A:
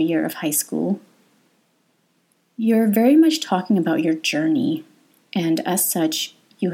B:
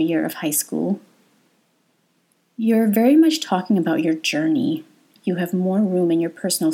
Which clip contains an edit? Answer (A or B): B